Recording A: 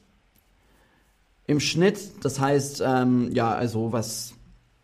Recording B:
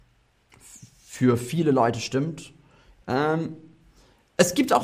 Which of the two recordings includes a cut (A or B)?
B